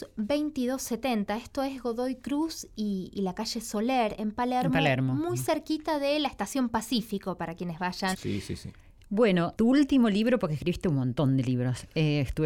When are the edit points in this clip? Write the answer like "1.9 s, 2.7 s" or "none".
8.1 s, 9.6 s

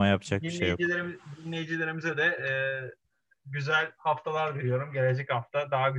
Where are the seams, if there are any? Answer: none

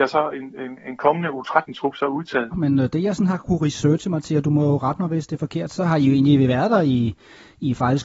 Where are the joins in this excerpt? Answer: 2.5 s

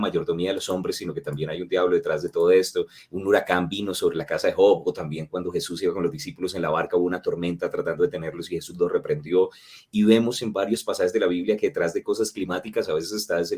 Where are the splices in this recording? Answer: 3.0 s

